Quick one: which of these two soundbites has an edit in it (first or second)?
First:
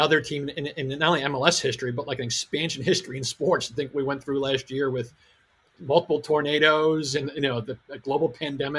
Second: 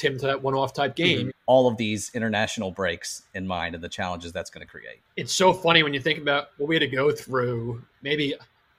second